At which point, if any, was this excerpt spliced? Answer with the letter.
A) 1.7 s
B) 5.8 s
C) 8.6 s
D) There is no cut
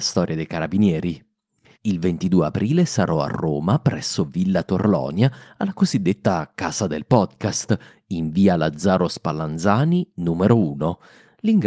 A